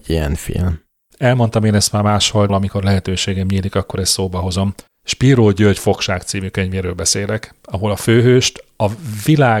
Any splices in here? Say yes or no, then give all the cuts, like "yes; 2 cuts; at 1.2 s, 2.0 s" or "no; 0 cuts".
yes; 3 cuts; at 1.1 s, 2.5 s, 4.9 s